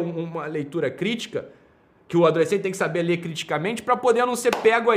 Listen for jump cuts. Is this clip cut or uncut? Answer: uncut